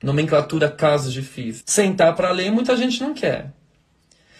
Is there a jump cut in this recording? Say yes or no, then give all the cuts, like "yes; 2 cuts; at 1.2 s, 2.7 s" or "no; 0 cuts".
yes; 1 cut; at 1.6 s